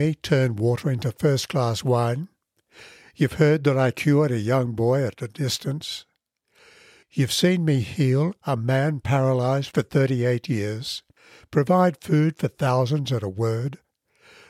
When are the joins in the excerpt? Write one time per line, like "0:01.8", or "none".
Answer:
none